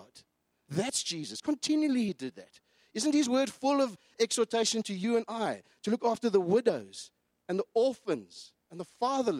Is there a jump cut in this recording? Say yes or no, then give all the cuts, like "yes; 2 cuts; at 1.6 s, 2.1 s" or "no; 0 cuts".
no; 0 cuts